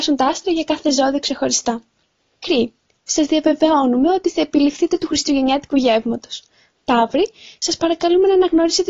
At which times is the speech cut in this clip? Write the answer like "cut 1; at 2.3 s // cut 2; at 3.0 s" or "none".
cut 1; at 6.7 s